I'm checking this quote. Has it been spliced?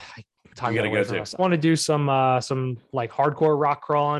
yes; 1 cut; at 1.4 s

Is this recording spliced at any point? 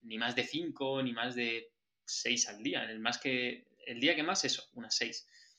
no; 0 cuts

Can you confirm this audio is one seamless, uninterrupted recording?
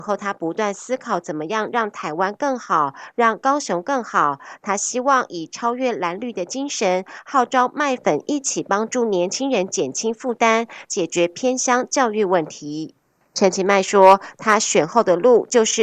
no; 1 cut; at 10.8 s

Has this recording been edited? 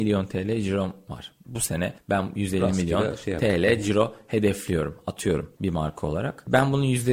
no; 0 cuts

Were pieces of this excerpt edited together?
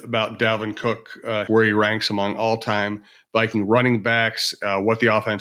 yes; 1 cut; at 1.5 s

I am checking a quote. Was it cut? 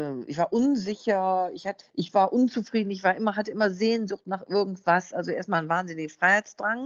yes; 1 cut; at 1.8 s

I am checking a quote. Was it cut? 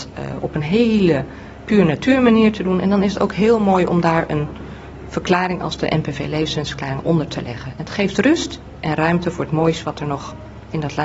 no; 0 cuts

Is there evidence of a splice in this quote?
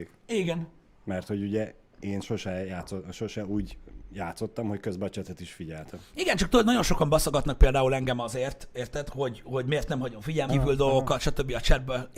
yes; 2 cuts; at 9.4 s, 10.5 s

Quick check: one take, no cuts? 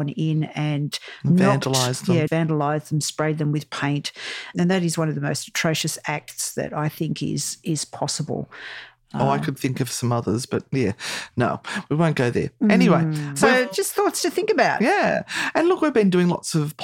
no; 1 cut; at 2.3 s

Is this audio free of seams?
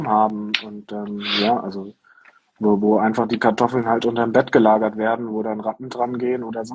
yes; 0 cuts

